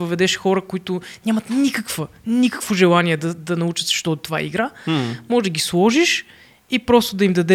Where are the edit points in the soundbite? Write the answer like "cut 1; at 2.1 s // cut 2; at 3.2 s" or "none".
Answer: none

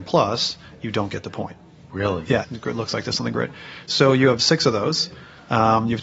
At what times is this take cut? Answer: cut 1; at 2.4 s

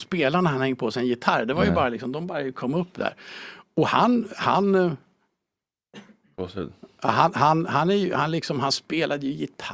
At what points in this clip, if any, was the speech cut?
none

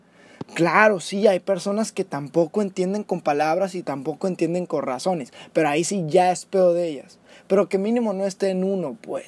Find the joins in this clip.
none

